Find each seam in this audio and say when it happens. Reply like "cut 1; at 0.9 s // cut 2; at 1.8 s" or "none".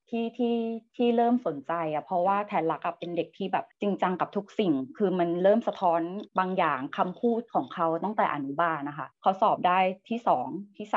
cut 1; at 3.7 s // cut 2; at 6.3 s // cut 3; at 9.1 s